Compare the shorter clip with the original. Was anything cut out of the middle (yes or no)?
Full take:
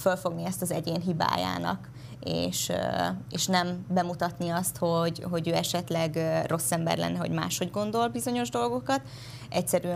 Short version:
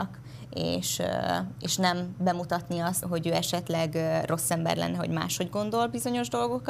yes